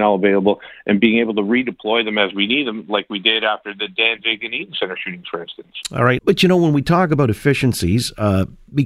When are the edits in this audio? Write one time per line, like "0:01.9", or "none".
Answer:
0:06.2